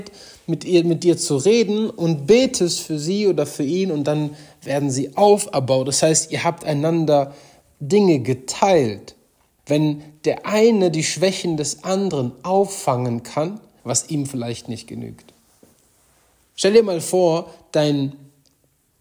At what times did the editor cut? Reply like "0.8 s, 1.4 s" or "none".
9.6 s, 13.8 s, 16.5 s